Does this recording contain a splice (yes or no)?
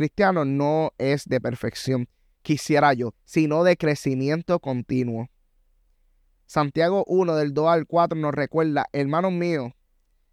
yes